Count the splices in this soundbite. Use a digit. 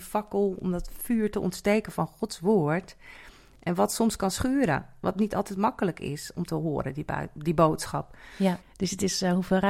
1